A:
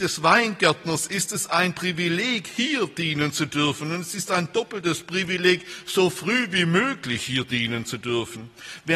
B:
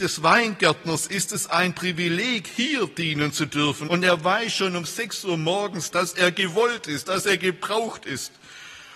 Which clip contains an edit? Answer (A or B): B